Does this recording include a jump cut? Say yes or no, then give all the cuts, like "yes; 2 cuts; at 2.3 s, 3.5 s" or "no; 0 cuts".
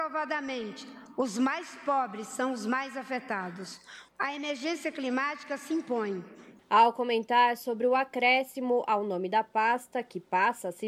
yes; 2 cuts; at 4.1 s, 6.6 s